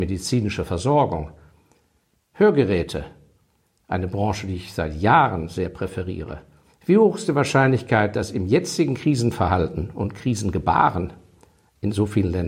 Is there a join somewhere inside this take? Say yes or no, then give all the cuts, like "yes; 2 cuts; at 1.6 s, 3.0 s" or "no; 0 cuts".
no; 0 cuts